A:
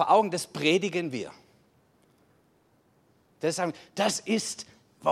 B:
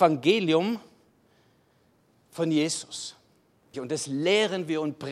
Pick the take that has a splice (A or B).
B